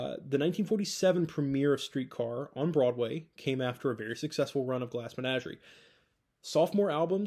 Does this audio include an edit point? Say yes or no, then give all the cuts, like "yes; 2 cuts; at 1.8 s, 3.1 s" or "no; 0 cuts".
no; 0 cuts